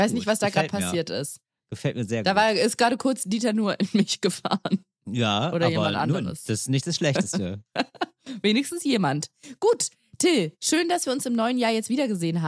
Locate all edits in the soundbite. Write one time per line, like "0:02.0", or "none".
none